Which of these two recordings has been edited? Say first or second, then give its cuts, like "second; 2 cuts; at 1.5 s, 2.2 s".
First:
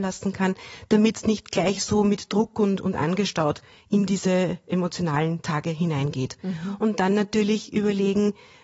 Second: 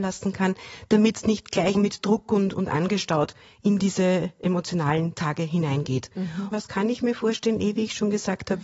second; 2 cuts; at 1.7 s, 6.5 s